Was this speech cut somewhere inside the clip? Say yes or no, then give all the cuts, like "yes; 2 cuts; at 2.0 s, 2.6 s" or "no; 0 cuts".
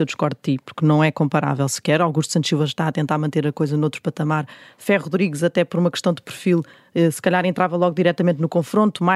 no; 0 cuts